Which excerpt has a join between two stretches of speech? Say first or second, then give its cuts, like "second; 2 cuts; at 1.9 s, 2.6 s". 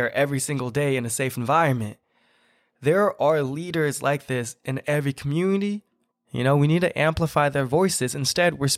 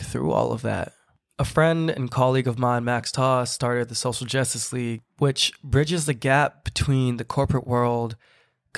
first; 1 cut; at 6.1 s